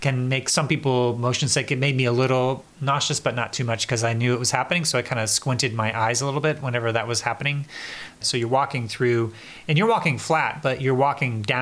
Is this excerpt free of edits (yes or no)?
no